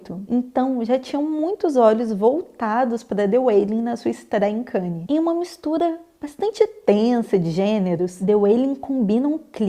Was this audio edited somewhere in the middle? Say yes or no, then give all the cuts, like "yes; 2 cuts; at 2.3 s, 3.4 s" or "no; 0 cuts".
yes; 1 cut; at 5.1 s